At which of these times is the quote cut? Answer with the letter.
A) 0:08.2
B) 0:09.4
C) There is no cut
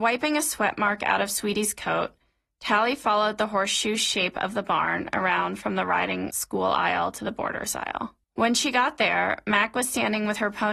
A